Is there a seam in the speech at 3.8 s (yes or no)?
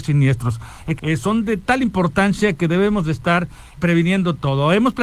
yes